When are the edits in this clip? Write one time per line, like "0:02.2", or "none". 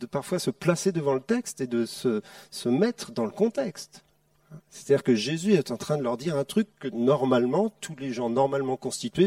none